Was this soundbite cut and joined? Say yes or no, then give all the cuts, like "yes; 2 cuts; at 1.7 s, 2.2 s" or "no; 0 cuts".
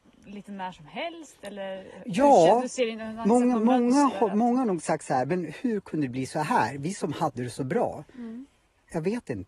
no; 0 cuts